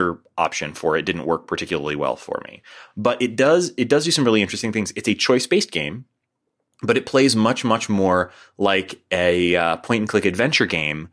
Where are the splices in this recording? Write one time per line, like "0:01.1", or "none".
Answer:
none